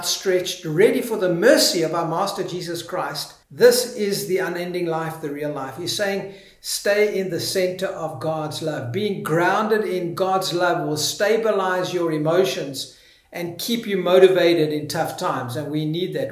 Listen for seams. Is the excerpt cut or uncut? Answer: cut